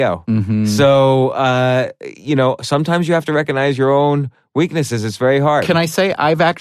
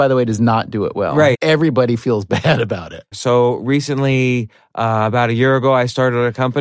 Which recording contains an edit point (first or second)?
second